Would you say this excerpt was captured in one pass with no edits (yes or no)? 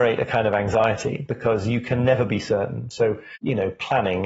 yes